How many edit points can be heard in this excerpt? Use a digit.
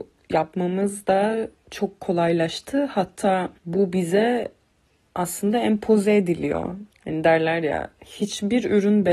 2